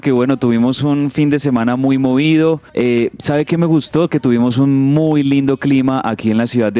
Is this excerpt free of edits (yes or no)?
no